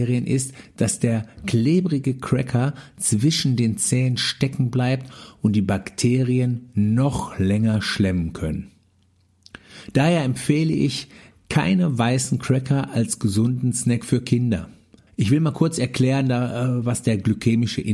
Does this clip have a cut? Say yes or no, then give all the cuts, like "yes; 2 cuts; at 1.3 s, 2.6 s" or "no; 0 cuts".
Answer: yes; 1 cut; at 15.1 s